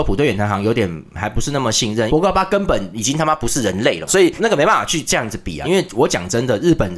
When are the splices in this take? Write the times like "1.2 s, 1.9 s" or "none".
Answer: 2.1 s, 4.1 s, 5.6 s